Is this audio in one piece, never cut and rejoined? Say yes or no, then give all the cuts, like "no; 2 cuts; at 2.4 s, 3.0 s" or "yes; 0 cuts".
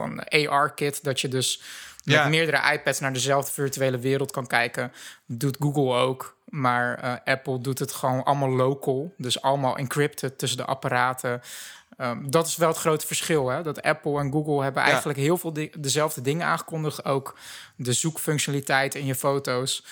yes; 0 cuts